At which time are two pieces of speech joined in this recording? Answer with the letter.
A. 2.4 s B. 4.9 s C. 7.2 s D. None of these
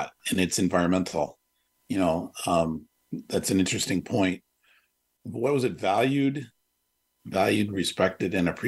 C